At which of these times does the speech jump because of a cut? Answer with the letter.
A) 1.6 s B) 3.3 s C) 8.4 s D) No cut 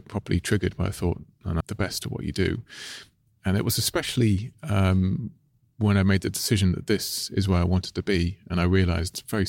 A